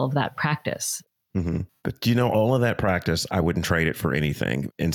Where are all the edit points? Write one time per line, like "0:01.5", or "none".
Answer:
0:01.7